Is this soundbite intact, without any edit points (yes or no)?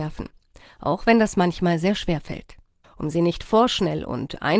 no